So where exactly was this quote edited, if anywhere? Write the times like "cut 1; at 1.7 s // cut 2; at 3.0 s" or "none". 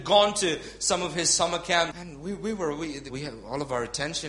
cut 1; at 1.9 s // cut 2; at 3.1 s